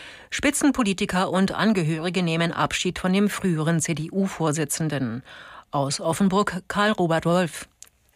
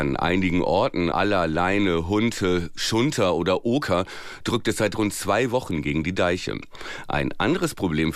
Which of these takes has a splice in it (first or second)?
second